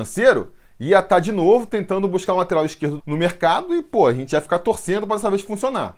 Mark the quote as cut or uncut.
cut